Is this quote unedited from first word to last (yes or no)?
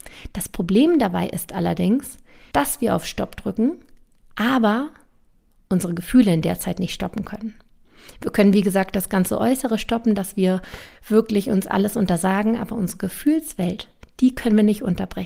yes